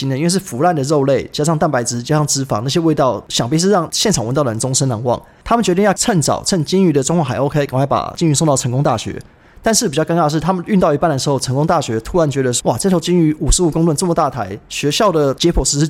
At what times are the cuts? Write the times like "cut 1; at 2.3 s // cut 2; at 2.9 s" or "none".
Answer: none

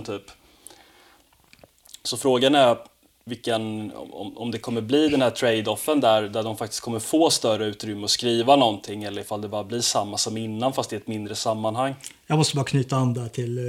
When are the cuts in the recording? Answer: none

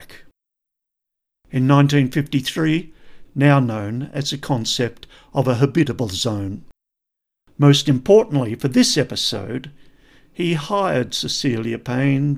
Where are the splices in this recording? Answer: cut 1; at 3.3 s

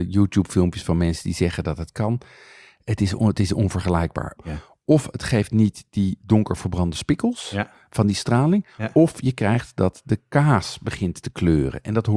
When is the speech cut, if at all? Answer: cut 1; at 4.4 s

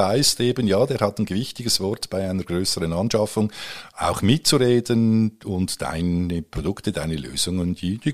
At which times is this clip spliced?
none

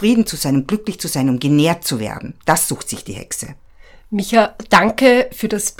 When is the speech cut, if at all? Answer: none

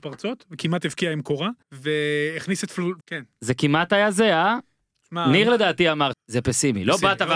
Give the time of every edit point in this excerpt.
cut 1; at 1.6 s // cut 2; at 3.0 s // cut 3; at 6.1 s

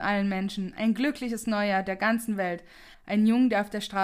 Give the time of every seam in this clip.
cut 1; at 2.9 s

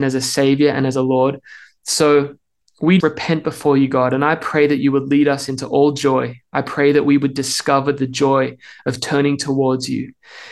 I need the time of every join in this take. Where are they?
cut 1; at 3.0 s

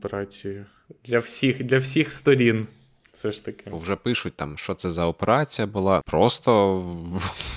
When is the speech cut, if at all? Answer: cut 1; at 6.0 s

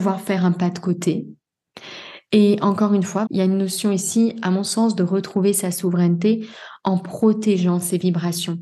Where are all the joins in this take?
cut 1; at 3.3 s

